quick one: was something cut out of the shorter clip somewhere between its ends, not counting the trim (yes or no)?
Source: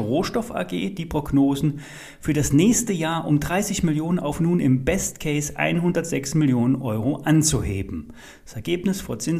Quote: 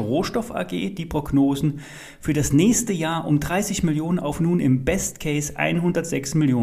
no